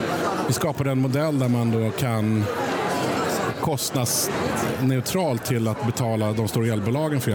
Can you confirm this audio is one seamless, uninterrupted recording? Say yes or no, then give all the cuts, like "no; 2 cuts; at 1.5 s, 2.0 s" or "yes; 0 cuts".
yes; 0 cuts